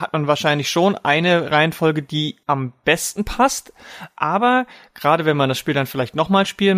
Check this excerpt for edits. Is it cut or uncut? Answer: uncut